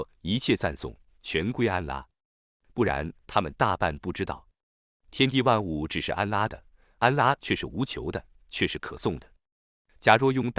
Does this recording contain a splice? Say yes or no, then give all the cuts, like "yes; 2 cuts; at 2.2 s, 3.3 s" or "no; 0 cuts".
no; 0 cuts